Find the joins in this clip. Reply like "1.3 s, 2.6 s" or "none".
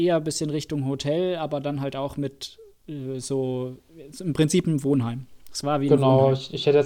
none